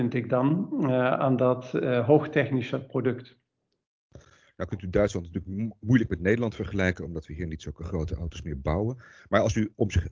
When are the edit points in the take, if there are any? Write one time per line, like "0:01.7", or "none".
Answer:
none